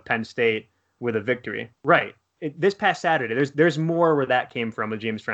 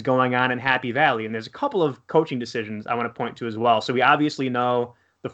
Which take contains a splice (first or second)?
first